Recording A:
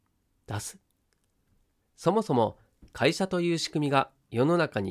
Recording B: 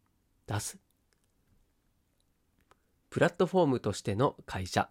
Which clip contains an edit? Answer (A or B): A